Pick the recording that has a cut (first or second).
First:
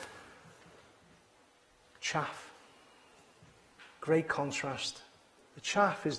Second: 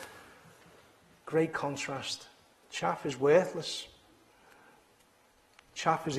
second